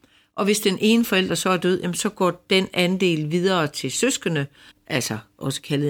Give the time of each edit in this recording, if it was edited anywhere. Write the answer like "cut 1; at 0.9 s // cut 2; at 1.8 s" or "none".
cut 1; at 4.7 s